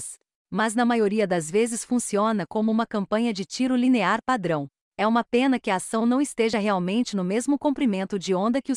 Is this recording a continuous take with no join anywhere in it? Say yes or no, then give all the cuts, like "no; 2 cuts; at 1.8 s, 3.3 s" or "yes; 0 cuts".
yes; 0 cuts